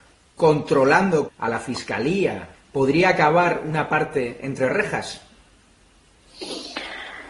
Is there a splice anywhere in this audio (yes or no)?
yes